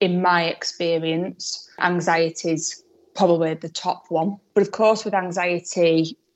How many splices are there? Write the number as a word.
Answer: zero